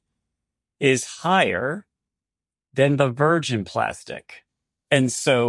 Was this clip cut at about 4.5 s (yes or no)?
no